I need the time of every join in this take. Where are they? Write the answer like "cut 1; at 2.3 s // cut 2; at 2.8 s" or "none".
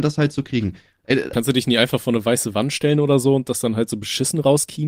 cut 1; at 1.3 s